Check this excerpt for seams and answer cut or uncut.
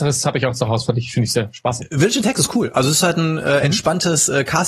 uncut